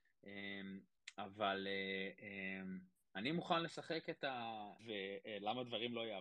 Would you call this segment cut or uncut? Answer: cut